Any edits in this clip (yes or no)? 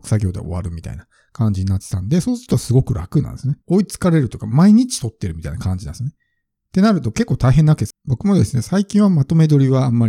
yes